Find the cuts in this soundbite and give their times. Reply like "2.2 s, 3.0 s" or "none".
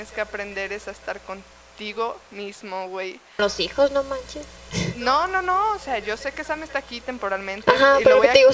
3.4 s